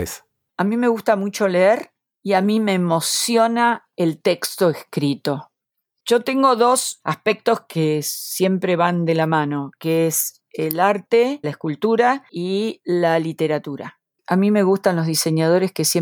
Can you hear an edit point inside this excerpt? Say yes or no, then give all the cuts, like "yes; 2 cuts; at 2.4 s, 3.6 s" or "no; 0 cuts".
yes; 2 cuts; at 11.4 s, 14.1 s